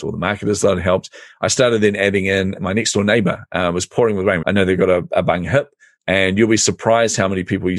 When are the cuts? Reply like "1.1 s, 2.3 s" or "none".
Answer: 4.4 s, 6.0 s